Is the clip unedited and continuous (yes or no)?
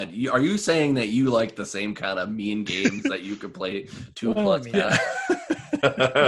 no